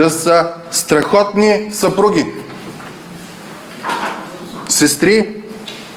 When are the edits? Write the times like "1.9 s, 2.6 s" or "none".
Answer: none